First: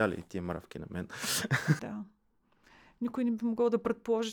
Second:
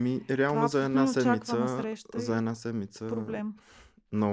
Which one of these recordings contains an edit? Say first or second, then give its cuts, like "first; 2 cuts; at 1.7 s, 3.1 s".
first; 1 cut; at 1.8 s